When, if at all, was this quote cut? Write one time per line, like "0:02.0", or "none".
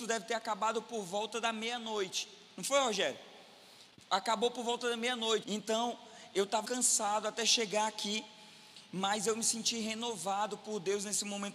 0:05.4
0:06.6